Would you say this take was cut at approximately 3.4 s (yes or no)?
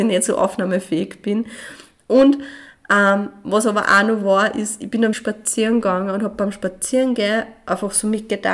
no